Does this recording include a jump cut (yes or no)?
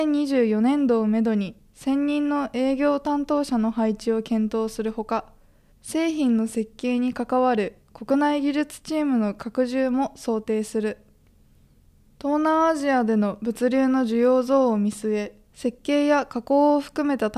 no